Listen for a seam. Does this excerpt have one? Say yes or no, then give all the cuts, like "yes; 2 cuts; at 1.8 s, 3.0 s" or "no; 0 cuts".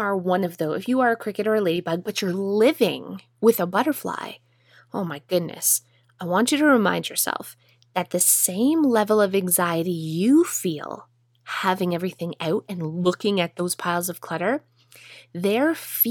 no; 0 cuts